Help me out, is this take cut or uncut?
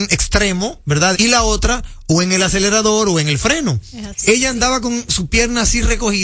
cut